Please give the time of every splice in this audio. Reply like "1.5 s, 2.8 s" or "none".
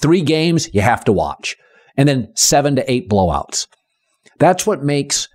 none